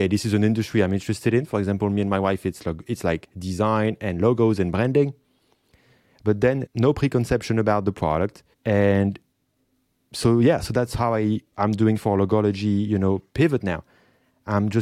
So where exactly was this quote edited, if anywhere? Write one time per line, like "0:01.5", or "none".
0:08.5